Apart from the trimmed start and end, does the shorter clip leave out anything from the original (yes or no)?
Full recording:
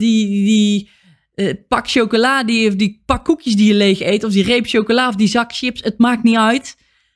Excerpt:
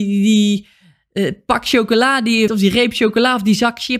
yes